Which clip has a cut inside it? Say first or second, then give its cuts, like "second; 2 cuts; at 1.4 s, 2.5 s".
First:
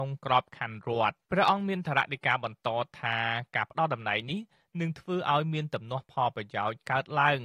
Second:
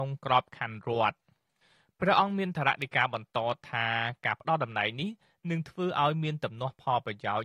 first; 1 cut; at 1.2 s